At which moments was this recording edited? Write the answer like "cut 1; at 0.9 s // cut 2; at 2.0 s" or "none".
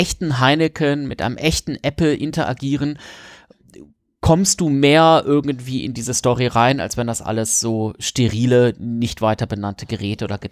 none